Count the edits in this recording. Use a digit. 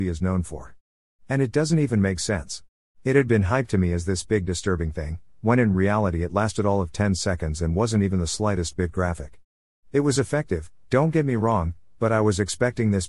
1